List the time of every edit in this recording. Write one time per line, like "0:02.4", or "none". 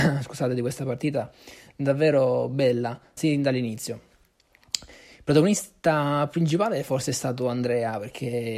0:03.2